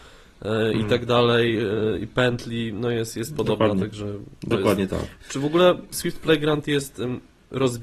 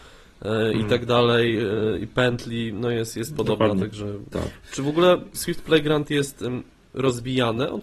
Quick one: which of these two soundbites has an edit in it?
second; 1 cut; at 4.3 s

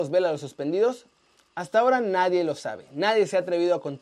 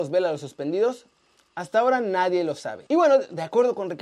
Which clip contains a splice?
second; 1 cut; at 2.9 s

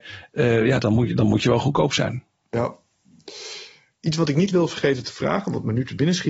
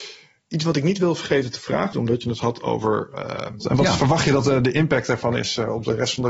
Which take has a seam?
second; 2 cuts; at 1.9 s, 3.6 s

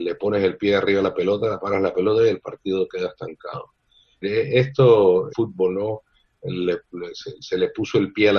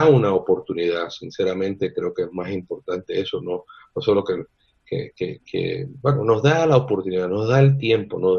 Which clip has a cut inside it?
first; 2 cuts; at 4.2 s, 5.3 s

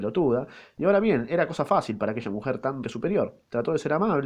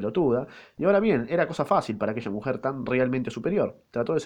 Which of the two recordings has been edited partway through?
first; 1 cut; at 2.8 s

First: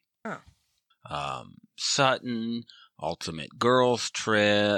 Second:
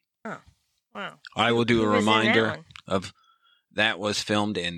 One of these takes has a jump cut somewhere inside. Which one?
first; 1 cut; at 0.9 s

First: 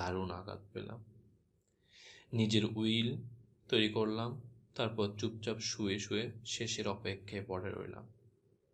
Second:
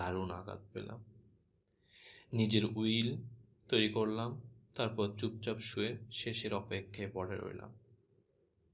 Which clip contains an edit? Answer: second; 1 cut; at 5.7 s

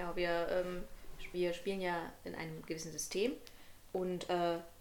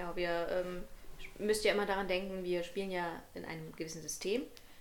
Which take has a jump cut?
first; 1 cut; at 1.3 s

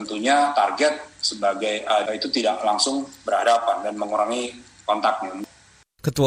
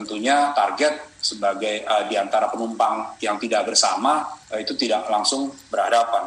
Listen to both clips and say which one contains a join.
first; 1 cut; at 2.1 s

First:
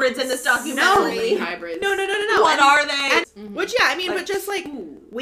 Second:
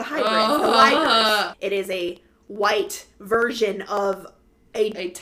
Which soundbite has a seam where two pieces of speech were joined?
second; 1 cut; at 1.5 s

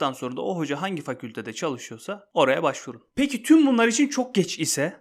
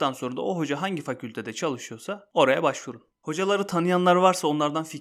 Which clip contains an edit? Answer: second; 1 cut; at 3.1 s

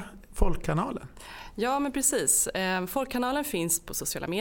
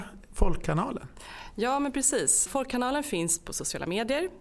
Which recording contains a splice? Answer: second; 1 cut; at 2.5 s

